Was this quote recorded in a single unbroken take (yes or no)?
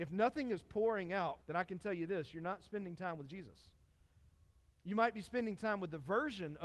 no